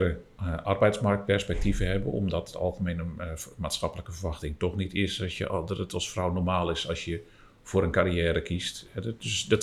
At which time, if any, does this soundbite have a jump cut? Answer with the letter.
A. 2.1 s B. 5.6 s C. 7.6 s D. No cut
D